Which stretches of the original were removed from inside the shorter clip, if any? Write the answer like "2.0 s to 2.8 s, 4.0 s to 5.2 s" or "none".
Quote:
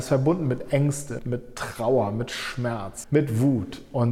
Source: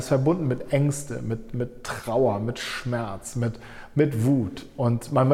1.2 s to 1.5 s, 3.3 s to 3.9 s